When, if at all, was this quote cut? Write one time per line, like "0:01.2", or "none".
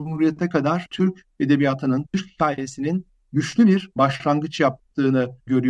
0:02.1